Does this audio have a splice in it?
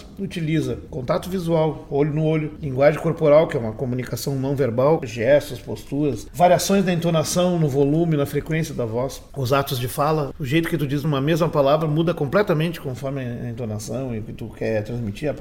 yes; 1 cut; at 5.0 s

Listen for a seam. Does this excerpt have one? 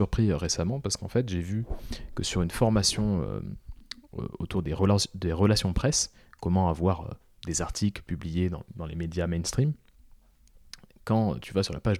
no; 0 cuts

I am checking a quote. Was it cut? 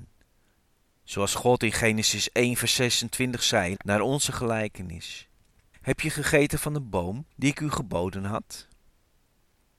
yes; 3 cuts; at 3.8 s, 5.7 s, 7.3 s

